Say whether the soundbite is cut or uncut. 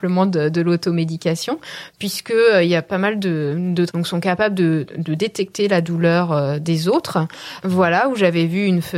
cut